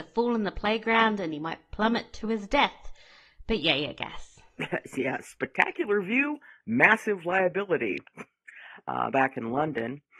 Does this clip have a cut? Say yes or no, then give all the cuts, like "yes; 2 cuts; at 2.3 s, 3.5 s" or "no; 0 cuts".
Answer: yes; 1 cut; at 9.1 s